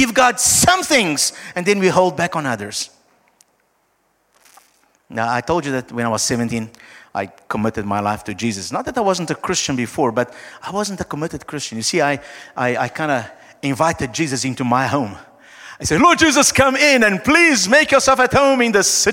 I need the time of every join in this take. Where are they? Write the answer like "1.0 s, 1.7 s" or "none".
none